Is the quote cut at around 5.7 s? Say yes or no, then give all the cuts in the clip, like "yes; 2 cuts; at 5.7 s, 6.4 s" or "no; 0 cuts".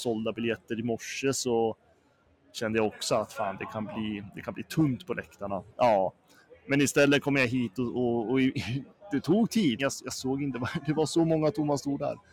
yes; 2 cuts; at 5.7 s, 9.8 s